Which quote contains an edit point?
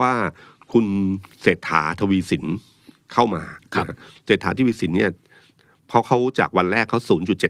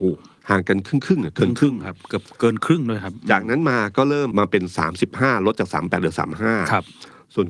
second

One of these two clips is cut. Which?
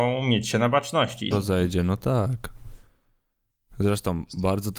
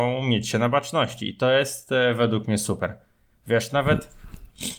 first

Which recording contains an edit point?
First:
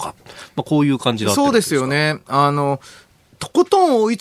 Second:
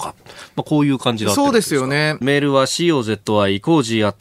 second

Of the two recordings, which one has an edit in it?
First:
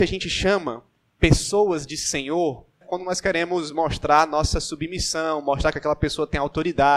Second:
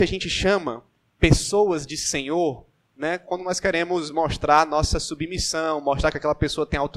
first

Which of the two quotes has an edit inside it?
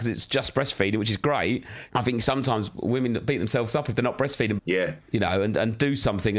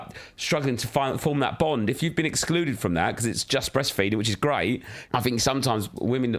first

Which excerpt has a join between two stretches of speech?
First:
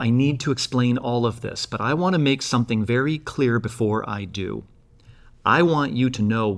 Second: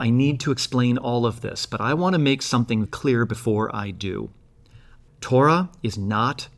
second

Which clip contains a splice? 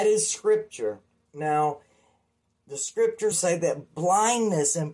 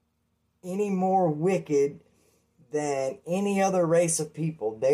first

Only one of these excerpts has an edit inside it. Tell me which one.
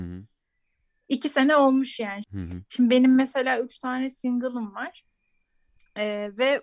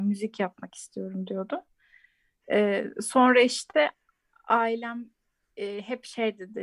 first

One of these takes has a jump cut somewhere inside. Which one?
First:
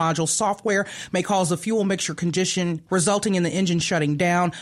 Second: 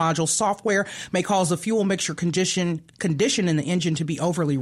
first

